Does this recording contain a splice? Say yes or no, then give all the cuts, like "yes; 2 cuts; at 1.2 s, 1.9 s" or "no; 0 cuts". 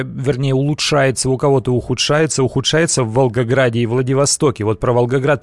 no; 0 cuts